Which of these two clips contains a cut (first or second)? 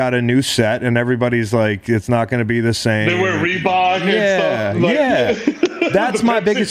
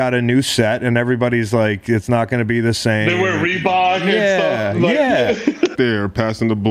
second